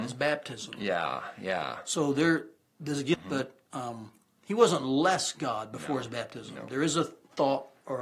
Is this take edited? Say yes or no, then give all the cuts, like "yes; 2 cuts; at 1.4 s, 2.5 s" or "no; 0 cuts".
yes; 1 cut; at 3.1 s